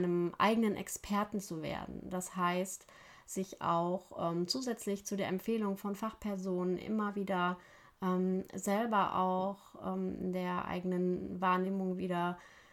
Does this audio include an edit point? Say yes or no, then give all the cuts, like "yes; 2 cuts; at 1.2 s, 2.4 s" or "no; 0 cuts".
no; 0 cuts